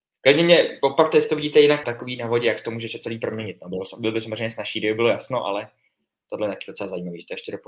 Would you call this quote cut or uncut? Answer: cut